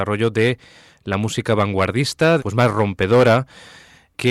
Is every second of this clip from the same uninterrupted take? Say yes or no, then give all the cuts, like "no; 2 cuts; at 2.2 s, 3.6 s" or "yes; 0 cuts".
no; 1 cut; at 2.4 s